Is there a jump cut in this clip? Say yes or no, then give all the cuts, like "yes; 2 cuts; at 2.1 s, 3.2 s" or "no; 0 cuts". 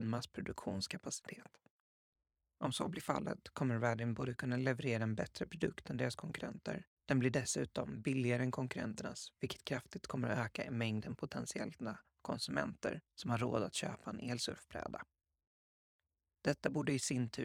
yes; 3 cuts; at 2.5 s, 7.0 s, 13.1 s